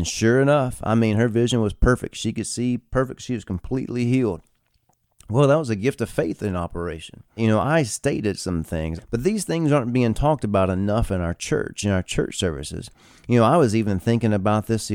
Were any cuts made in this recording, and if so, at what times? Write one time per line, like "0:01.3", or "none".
0:07.4
0:09.0